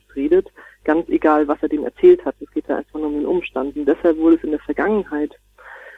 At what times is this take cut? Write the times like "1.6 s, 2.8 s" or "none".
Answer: none